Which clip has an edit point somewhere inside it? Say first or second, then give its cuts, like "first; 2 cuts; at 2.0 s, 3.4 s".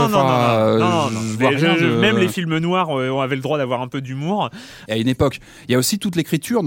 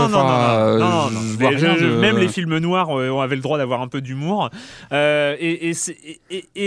first; 1 cut; at 4.9 s